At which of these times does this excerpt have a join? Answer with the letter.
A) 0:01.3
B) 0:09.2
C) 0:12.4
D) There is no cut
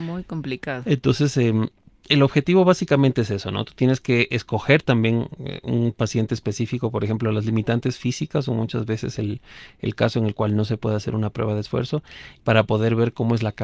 C